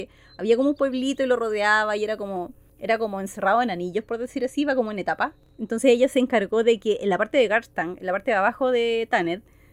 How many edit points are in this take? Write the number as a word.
zero